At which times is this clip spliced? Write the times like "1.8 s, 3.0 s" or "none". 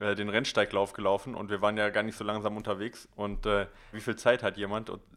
3.9 s